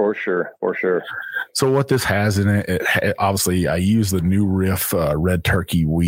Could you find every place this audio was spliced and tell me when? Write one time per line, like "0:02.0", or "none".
none